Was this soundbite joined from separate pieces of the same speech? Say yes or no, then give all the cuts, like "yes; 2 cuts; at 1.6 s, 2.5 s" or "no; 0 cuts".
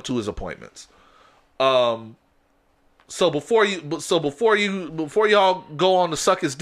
no; 0 cuts